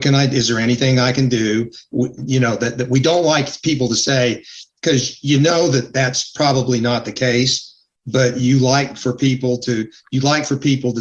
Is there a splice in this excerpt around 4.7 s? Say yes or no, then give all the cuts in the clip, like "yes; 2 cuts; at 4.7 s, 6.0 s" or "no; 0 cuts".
yes; 1 cut; at 4.7 s